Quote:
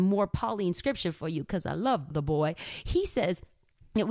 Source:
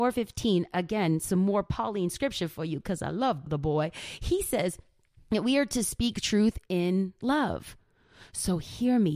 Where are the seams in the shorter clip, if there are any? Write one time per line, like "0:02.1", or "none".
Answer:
none